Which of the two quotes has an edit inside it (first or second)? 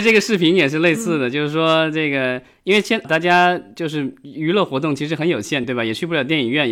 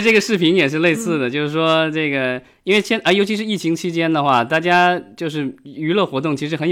first